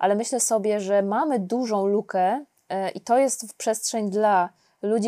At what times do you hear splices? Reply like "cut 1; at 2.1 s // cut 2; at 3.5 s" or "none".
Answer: none